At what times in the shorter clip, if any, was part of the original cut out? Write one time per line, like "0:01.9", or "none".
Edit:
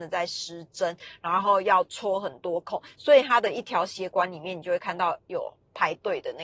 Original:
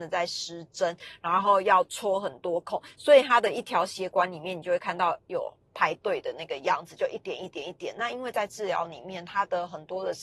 none